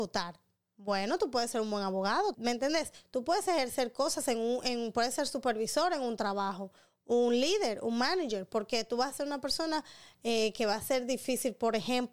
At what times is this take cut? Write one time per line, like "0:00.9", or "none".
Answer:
0:02.3